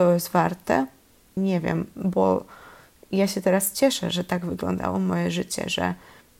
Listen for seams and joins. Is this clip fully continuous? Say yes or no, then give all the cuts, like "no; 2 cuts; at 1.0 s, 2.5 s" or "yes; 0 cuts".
no; 1 cut; at 1.4 s